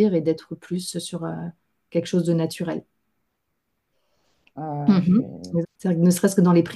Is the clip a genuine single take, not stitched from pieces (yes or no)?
no